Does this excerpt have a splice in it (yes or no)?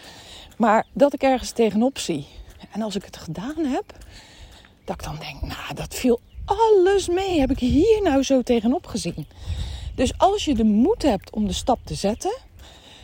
no